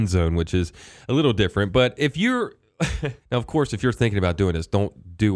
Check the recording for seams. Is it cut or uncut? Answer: cut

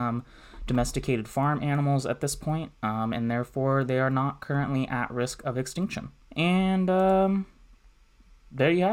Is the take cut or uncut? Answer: cut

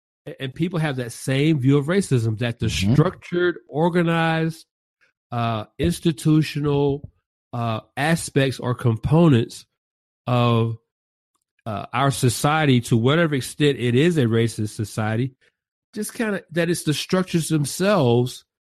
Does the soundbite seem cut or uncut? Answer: uncut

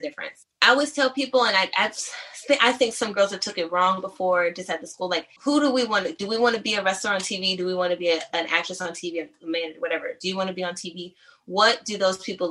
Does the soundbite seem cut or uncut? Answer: uncut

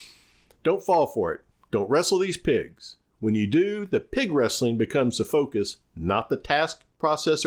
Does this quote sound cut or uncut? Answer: uncut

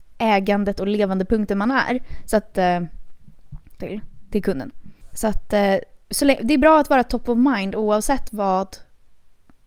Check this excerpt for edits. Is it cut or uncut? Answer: cut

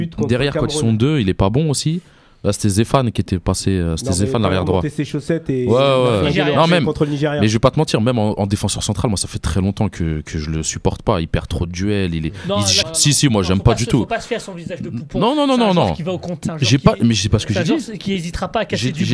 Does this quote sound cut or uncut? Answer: cut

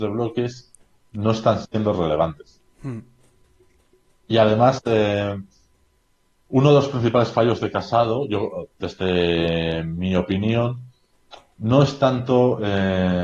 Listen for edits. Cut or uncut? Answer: uncut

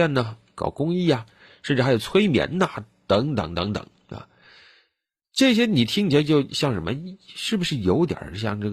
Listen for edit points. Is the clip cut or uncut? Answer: uncut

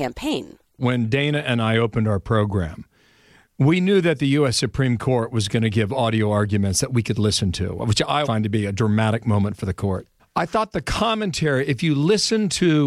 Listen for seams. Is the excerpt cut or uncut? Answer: cut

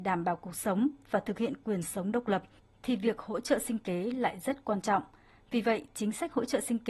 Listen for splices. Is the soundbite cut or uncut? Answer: uncut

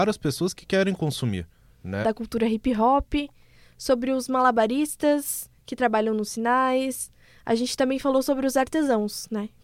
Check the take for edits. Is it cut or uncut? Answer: cut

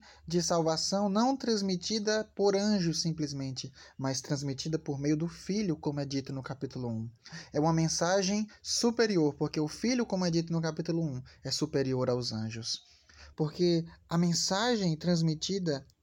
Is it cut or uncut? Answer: cut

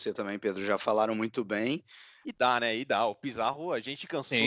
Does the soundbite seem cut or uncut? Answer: cut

